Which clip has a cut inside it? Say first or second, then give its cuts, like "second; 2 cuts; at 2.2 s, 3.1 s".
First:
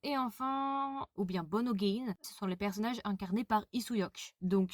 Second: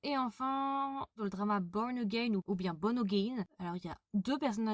first; 2 cuts; at 1.1 s, 2.2 s